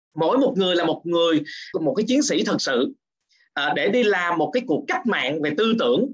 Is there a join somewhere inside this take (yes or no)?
yes